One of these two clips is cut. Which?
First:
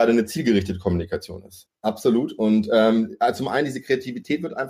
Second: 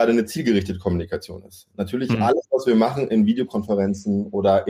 first; 1 cut; at 1.7 s

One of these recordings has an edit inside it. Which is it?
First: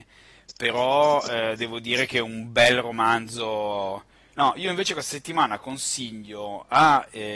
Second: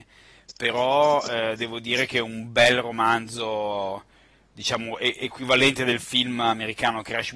first; 1 cut; at 4.3 s

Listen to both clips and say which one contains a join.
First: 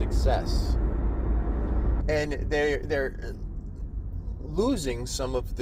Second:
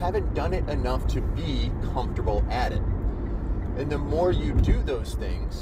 first; 1 cut; at 2.0 s

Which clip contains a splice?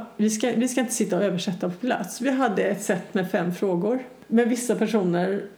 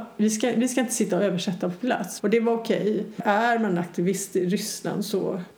second; 1 cut; at 2.2 s

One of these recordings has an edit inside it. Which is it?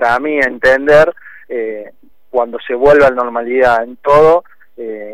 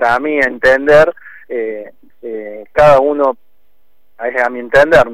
second; 1 cut; at 2.1 s

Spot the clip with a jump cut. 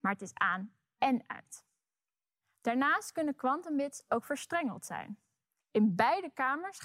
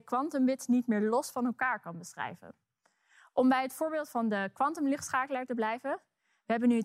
first; 1 cut; at 5.6 s

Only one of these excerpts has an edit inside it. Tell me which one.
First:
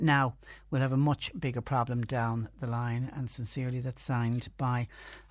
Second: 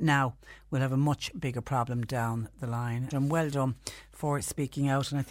second; 1 cut; at 3.1 s

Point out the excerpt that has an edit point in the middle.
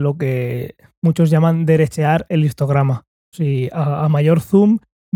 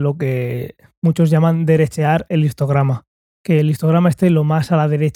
first; 1 cut; at 3.3 s

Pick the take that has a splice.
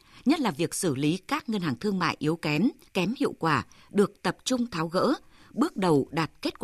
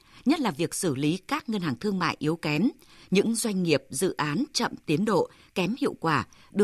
first; 1 cut; at 2.9 s

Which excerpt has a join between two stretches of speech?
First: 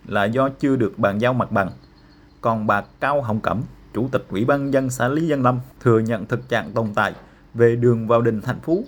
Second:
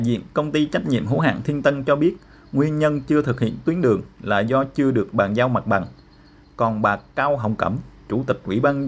first; 1 cut; at 5.7 s

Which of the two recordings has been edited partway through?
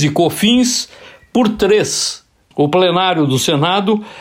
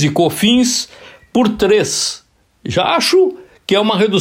first; 1 cut; at 2.5 s

